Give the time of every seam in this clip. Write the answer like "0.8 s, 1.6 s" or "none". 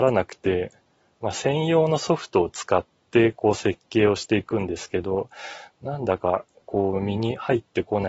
none